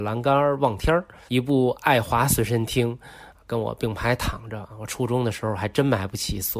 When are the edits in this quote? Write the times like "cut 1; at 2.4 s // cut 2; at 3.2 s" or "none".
cut 1; at 1.3 s